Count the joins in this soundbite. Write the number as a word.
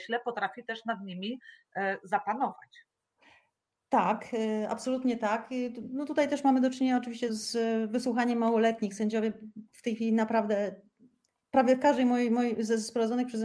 one